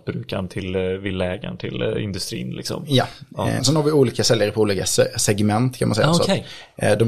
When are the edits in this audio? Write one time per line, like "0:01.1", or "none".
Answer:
0:03.6